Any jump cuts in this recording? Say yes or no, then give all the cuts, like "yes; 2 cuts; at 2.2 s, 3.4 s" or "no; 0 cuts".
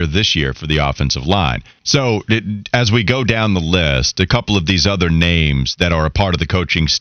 yes; 1 cut; at 1.8 s